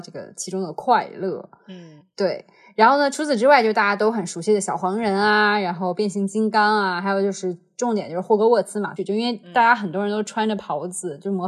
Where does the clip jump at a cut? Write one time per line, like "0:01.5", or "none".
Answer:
0:09.0